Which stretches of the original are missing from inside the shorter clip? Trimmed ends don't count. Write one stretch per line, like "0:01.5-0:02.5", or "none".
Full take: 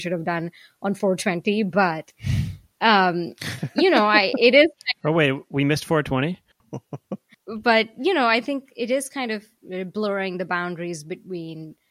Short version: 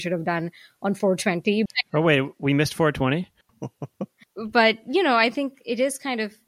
0:01.7-0:04.8